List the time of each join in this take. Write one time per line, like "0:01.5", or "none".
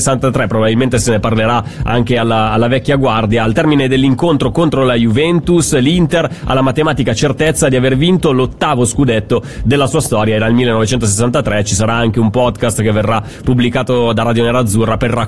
none